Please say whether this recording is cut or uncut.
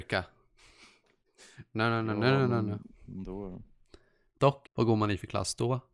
cut